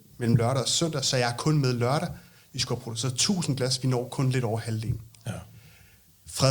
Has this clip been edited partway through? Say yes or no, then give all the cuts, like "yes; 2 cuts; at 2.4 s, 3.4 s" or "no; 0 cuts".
no; 0 cuts